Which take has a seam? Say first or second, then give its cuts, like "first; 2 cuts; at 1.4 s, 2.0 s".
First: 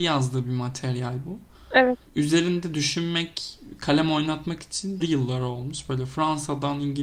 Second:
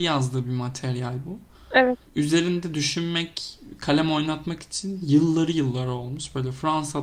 first; 1 cut; at 5.0 s